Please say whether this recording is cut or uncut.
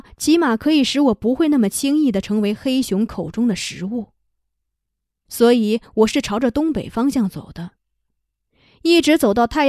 cut